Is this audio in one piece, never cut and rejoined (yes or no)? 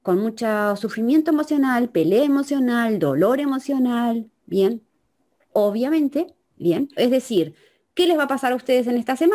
no